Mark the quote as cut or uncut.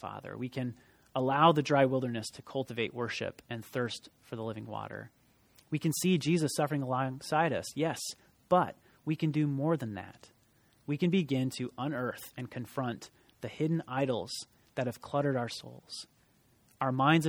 uncut